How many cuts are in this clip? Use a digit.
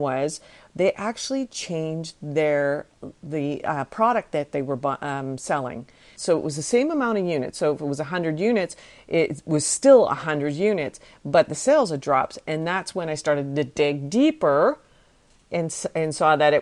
1